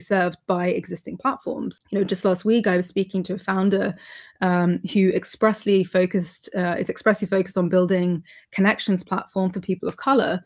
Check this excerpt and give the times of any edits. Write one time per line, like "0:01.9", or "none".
none